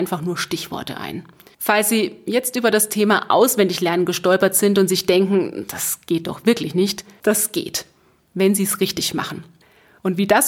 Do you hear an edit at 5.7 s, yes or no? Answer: no